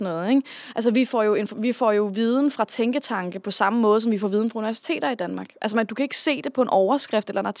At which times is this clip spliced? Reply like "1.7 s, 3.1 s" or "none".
none